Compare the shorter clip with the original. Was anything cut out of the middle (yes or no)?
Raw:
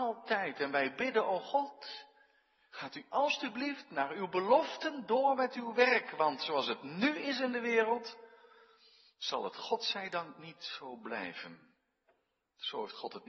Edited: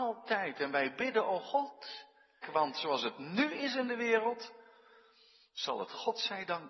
yes